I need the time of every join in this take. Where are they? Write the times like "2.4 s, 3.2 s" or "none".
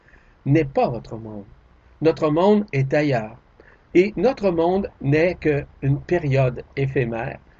3.9 s, 4.9 s